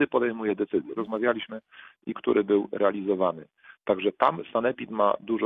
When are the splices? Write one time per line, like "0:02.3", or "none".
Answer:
0:01.0
0:02.1

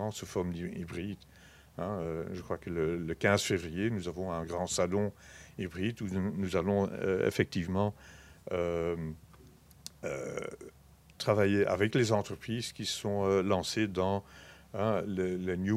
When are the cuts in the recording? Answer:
none

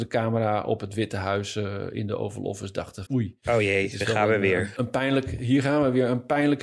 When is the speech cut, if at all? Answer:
0:03.1

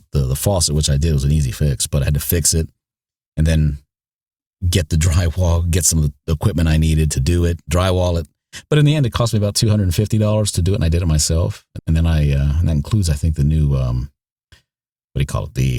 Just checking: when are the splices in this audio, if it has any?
0:11.8

